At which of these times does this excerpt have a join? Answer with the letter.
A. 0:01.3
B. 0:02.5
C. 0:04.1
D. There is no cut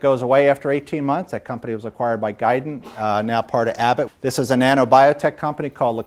C